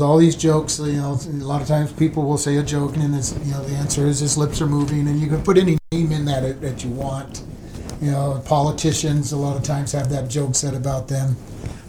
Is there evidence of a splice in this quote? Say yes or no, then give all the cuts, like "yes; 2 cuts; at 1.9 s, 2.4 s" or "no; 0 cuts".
yes; 1 cut; at 2.9 s